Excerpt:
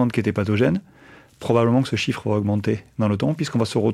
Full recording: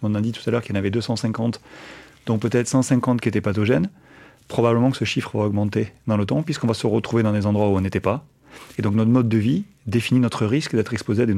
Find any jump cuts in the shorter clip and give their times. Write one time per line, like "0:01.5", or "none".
none

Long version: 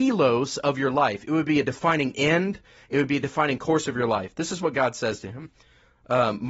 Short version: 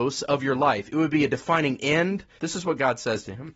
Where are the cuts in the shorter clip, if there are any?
0:02.4

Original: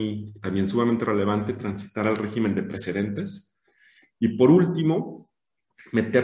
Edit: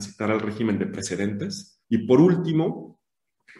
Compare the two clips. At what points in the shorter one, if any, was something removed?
0:01.8

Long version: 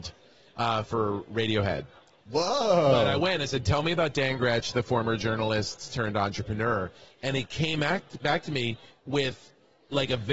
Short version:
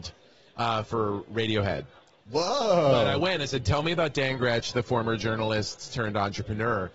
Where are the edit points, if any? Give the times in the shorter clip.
none

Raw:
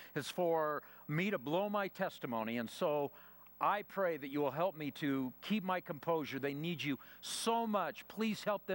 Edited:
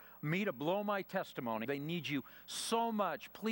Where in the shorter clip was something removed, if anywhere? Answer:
0:01.6

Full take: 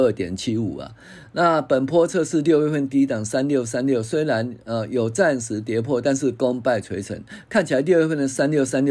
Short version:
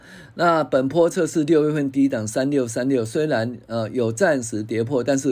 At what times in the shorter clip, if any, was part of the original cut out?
none

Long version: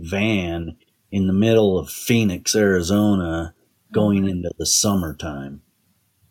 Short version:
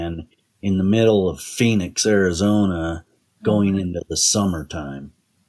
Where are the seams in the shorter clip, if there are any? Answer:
none

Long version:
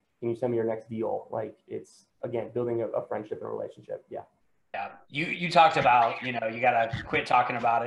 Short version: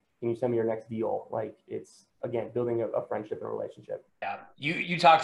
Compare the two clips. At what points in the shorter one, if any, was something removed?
0:04.1

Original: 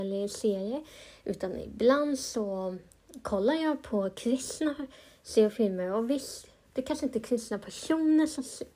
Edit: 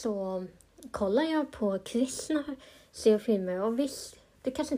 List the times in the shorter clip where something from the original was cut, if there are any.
none

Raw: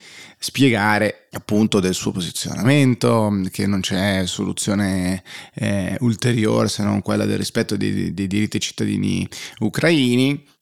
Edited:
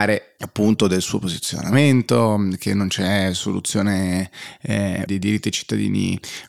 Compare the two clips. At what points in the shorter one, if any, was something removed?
0:05.1

